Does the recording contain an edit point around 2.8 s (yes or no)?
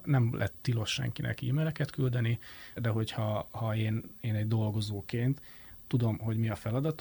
yes